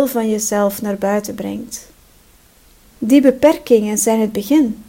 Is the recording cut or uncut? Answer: cut